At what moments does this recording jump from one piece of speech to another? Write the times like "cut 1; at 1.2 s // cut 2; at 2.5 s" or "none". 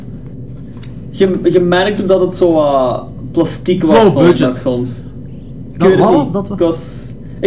none